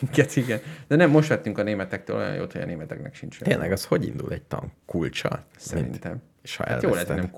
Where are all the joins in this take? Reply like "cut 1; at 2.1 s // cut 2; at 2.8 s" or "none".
cut 1; at 6.3 s